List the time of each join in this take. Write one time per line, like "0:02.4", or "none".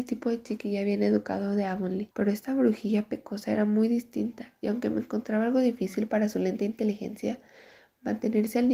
0:02.1

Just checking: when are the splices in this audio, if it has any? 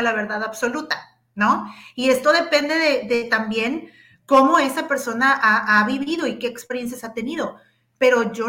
none

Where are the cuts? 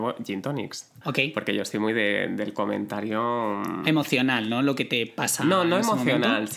0:01.0

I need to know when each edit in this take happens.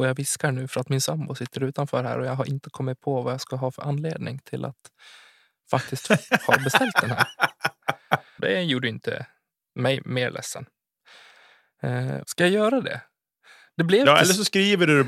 0:08.4
0:12.2

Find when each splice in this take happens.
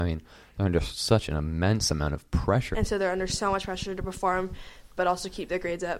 0:02.7

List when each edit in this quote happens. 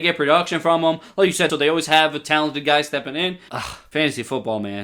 0:01.5
0:03.5

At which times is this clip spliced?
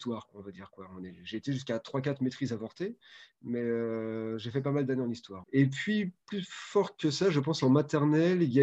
0:05.4

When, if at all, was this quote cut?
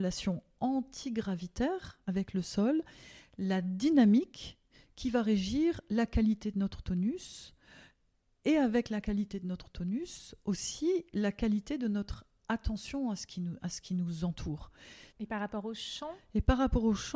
0:15.1

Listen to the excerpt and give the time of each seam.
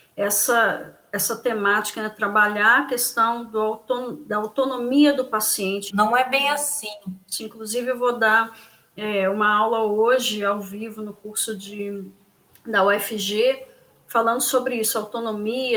0:05.9
0:07.4

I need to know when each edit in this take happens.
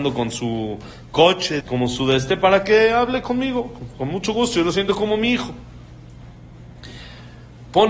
0:01.6

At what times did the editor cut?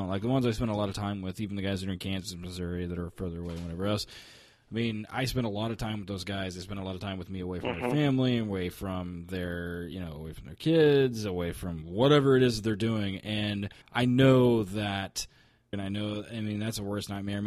0:13.8
0:15.7

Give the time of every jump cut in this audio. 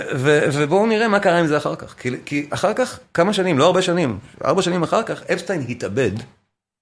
none

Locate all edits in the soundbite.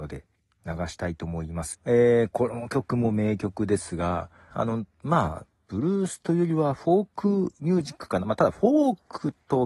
0:01.7
0:04.5

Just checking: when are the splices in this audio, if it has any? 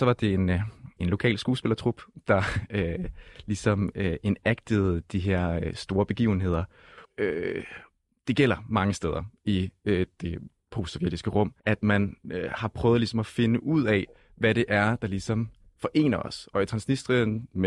0:01.0
0:07.0
0:11.6

